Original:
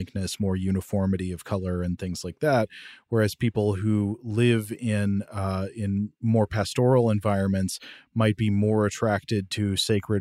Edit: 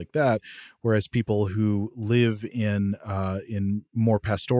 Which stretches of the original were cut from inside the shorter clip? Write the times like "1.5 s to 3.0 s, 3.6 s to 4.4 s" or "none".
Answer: none